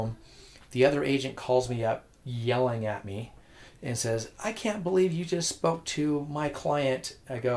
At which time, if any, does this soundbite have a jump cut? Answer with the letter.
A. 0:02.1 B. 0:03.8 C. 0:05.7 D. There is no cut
D